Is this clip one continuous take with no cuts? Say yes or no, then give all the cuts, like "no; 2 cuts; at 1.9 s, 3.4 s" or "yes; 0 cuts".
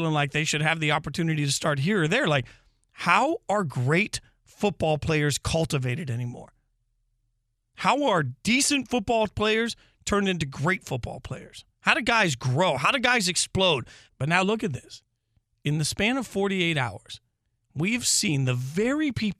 no; 2 cuts; at 11.7 s, 14.1 s